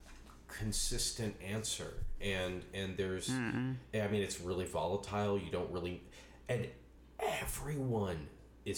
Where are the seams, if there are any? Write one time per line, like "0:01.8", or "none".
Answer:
none